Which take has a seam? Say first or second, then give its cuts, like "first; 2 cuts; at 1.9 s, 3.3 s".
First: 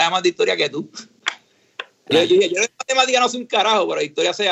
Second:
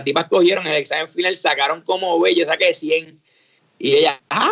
first; 1 cut; at 2.1 s